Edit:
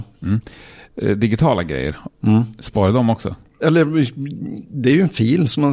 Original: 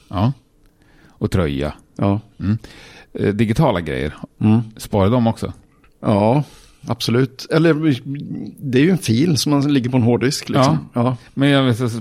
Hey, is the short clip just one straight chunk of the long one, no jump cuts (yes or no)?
no